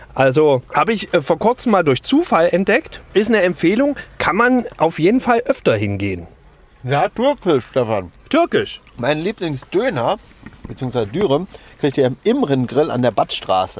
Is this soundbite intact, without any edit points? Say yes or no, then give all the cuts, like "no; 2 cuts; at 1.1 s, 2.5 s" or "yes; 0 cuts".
no; 1 cut; at 7.1 s